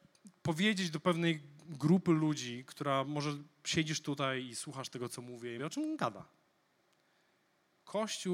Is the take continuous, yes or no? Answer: no